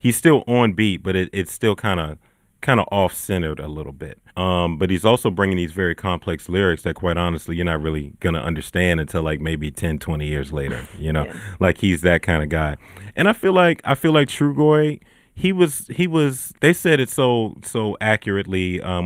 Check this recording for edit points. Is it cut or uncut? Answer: cut